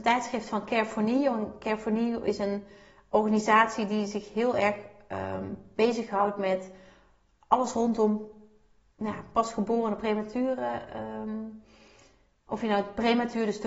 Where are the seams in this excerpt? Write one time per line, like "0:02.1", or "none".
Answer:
none